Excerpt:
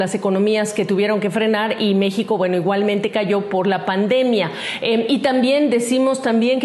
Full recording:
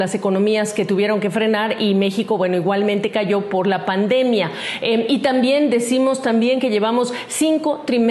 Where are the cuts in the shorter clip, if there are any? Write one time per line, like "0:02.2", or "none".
none